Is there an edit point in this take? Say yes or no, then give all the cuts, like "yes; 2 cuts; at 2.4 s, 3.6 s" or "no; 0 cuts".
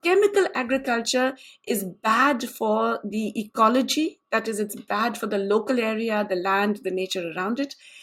no; 0 cuts